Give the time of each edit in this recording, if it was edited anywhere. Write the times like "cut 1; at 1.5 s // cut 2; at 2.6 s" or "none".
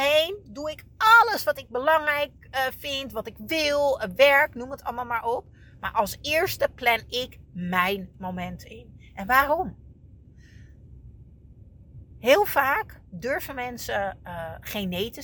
none

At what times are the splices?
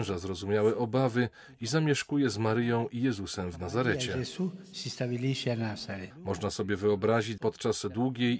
cut 1; at 6.1 s // cut 2; at 7.4 s

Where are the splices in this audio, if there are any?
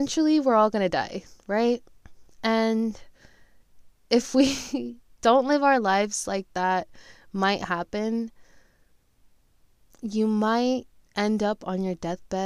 none

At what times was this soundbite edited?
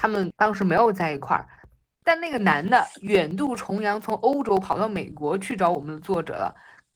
none

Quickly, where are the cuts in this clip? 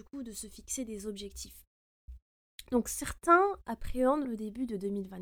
cut 1; at 4.2 s

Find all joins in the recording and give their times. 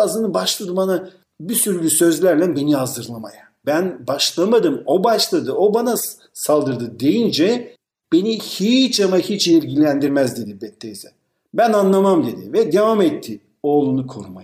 cut 1; at 3.6 s

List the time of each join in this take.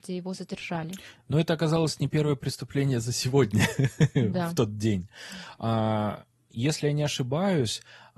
none

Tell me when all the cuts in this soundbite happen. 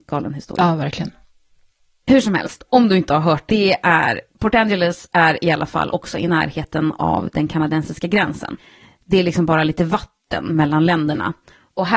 cut 1; at 3.5 s

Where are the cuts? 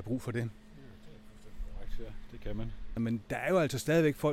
cut 1; at 3.0 s

